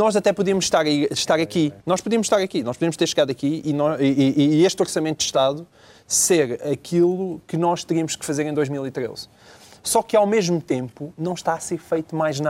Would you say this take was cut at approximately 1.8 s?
yes; 1 cut; at 1.8 s

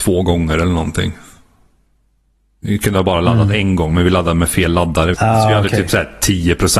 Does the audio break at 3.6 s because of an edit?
no; 1 cut; at 5.1 s

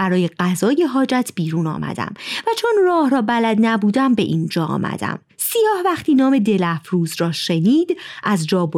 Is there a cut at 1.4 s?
no; 1 cut; at 5.3 s

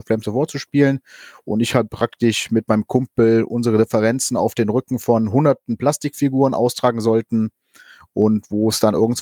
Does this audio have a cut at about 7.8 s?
no; 0 cuts

